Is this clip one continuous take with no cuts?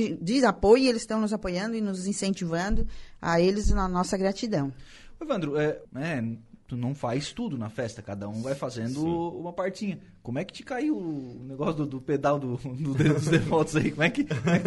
no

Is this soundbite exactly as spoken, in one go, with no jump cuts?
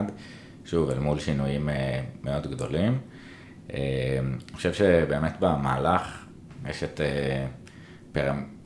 yes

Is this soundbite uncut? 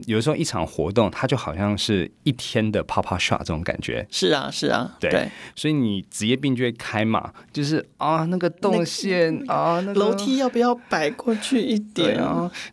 yes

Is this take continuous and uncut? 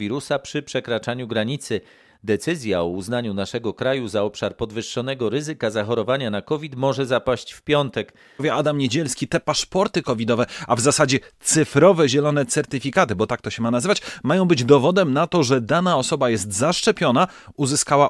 no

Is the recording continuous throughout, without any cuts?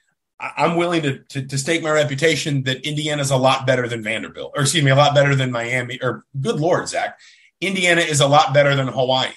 yes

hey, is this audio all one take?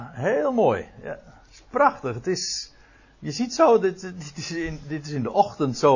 yes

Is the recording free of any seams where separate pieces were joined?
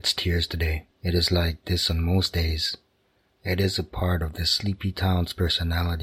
no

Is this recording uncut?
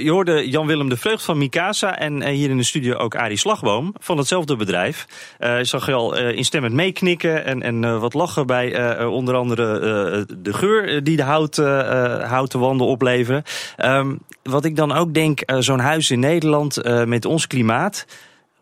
yes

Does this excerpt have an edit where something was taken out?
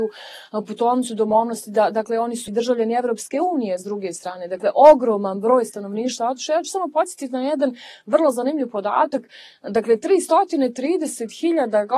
yes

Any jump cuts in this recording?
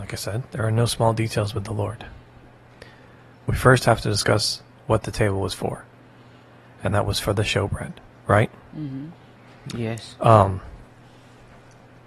yes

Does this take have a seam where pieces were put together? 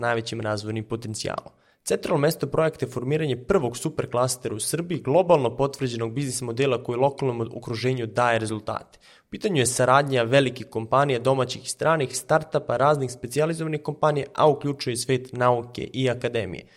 no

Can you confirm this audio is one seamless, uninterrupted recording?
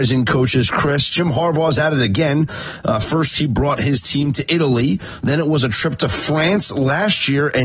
yes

